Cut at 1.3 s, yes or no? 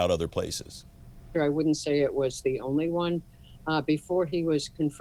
yes